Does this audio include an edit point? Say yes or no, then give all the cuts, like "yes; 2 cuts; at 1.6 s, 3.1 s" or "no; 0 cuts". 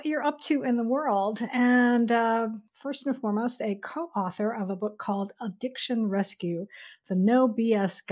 yes; 1 cut; at 2.7 s